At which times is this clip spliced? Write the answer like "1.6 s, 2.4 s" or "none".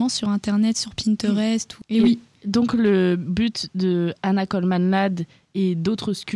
1.8 s